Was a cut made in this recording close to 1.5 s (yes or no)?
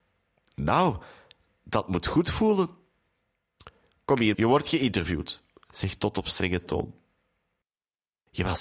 no